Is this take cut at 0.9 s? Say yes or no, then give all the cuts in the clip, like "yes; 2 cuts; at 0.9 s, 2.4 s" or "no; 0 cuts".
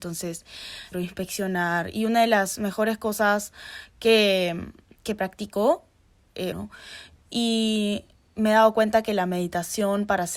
yes; 2 cuts; at 0.9 s, 6.5 s